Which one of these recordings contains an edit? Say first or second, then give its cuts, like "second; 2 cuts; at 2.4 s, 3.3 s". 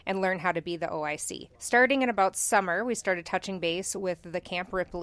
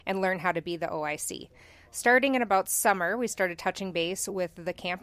first; 1 cut; at 1.5 s